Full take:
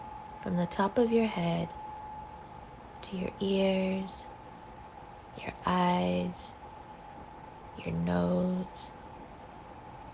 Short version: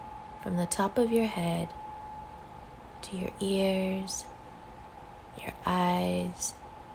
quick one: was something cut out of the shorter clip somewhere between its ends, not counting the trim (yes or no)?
no